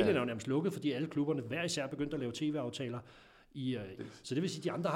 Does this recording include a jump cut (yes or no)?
yes